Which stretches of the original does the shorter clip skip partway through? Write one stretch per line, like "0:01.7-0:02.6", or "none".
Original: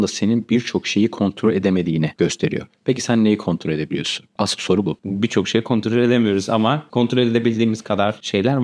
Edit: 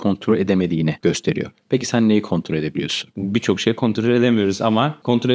0:04.3-0:05.0